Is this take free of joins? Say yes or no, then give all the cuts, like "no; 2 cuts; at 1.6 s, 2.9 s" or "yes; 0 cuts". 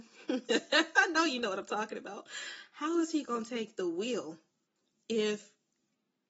yes; 0 cuts